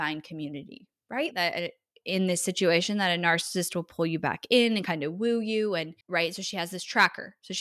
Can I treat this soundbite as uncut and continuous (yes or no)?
no